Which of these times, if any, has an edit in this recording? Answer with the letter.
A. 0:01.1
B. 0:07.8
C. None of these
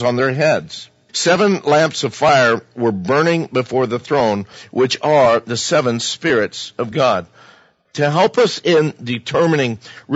A